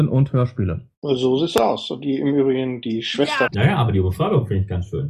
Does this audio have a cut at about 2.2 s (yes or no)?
no